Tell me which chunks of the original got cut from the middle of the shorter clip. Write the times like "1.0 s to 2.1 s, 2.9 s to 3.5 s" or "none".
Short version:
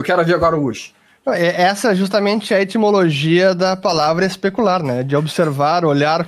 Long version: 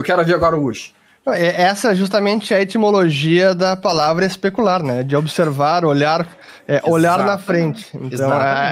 none

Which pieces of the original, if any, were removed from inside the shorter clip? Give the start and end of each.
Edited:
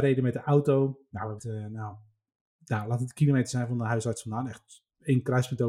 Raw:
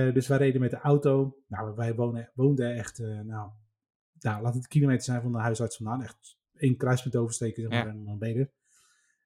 1.8 s to 2.9 s

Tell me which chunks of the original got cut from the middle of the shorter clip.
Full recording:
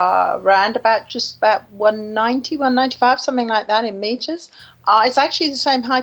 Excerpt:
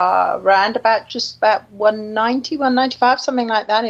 none

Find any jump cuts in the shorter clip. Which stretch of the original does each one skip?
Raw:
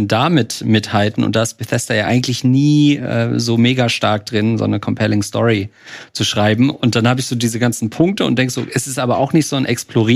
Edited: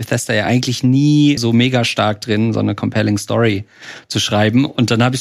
3.0 s to 3.4 s

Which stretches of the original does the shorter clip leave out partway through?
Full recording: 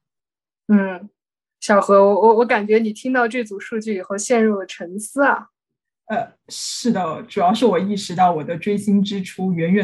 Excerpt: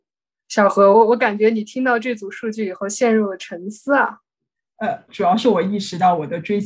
2.0 s to 2.2 s, 6.4 s to 7.2 s

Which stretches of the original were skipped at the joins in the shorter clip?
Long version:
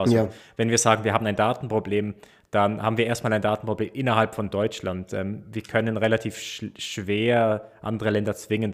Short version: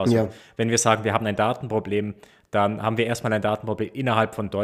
none

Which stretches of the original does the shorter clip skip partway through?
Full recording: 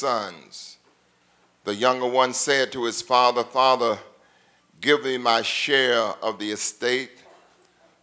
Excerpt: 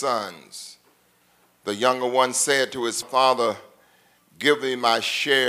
3.0 s to 3.4 s

